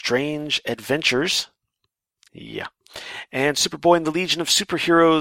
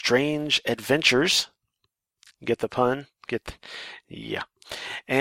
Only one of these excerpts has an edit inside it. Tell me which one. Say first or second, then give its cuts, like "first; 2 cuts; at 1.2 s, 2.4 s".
first; 1 cut; at 2.3 s